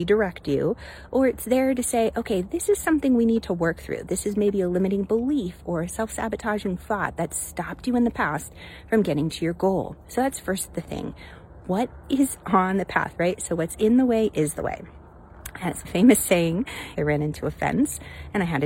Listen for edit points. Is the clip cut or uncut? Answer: cut